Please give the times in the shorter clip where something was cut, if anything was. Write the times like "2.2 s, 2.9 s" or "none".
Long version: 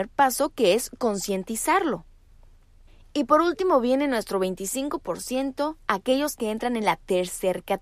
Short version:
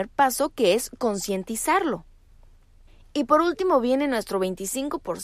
none